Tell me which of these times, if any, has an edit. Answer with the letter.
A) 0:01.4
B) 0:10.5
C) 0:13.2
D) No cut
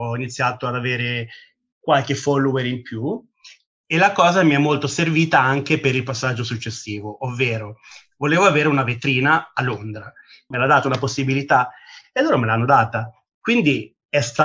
B